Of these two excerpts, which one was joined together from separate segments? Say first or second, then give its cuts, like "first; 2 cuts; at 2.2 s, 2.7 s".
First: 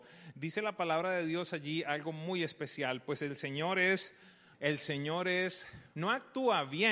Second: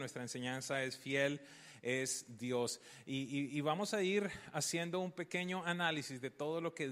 first; 2 cuts; at 4.5 s, 5.9 s